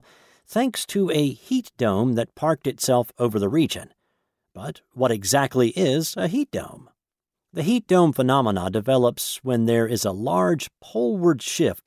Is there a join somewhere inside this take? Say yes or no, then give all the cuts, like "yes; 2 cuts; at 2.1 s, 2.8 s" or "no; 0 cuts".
no; 0 cuts